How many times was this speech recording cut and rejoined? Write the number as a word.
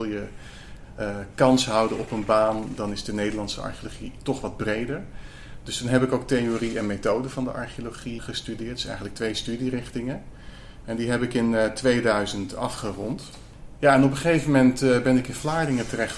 one